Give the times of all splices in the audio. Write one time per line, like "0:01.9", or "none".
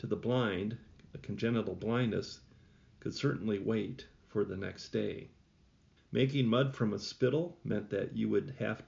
0:06.0